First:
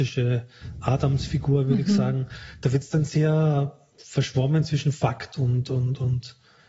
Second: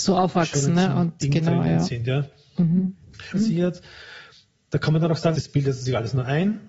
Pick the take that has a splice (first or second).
second